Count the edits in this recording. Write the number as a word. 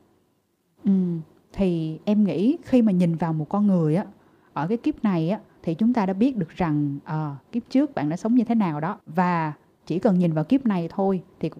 one